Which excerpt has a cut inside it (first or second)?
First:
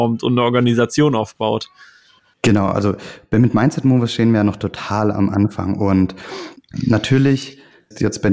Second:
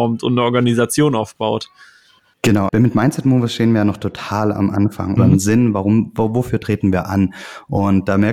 second